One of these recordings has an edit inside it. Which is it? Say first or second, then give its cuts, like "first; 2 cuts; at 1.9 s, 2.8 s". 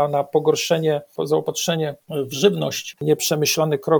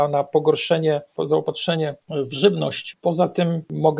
first; 1 cut; at 3.0 s